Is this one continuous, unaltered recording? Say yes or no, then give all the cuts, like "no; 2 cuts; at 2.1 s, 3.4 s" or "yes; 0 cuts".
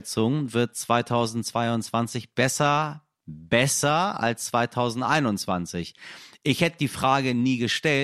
yes; 0 cuts